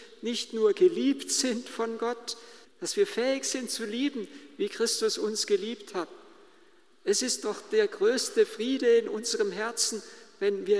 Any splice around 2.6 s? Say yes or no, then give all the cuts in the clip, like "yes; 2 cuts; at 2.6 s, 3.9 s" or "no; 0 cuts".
yes; 1 cut; at 2.6 s